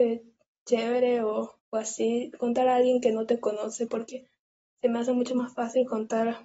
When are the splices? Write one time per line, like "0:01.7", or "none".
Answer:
0:01.6
0:03.9